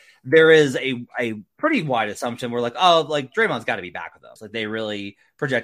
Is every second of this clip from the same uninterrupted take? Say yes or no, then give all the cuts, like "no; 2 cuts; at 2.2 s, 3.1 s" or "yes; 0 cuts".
no; 1 cut; at 4.4 s